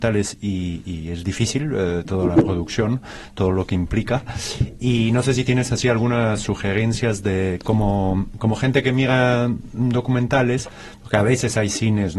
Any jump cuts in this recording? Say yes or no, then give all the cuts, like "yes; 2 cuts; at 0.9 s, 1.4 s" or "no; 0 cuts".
no; 0 cuts